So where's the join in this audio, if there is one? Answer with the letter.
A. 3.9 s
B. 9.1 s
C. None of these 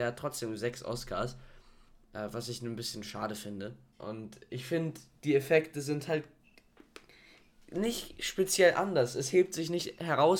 A